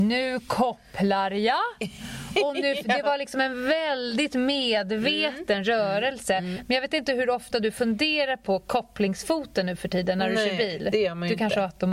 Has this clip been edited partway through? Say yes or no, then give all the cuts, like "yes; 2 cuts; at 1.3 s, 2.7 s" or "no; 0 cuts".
no; 0 cuts